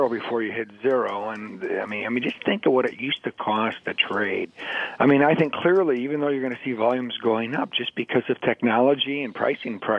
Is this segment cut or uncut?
cut